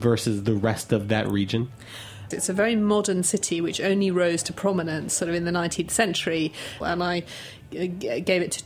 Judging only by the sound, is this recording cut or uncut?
cut